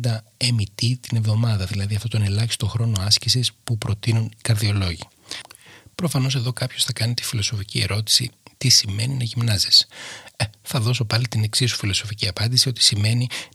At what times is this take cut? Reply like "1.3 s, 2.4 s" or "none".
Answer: none